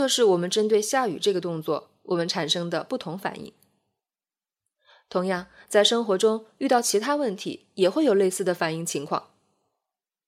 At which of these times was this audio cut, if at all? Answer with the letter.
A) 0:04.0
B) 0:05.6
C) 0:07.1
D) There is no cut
D